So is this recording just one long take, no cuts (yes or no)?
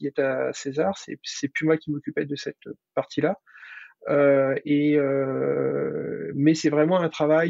yes